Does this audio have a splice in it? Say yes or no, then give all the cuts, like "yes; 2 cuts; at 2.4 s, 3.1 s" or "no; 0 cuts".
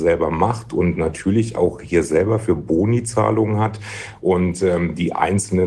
no; 0 cuts